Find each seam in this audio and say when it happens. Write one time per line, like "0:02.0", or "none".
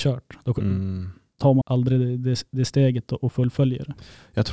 0:01.6